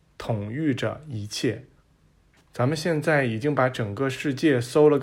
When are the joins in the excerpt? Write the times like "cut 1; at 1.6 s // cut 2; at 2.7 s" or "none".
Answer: cut 1; at 2.5 s